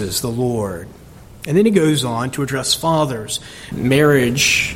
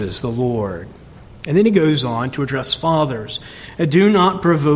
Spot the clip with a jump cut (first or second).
first